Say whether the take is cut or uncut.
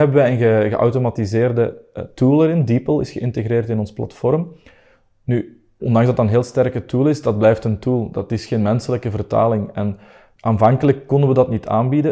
cut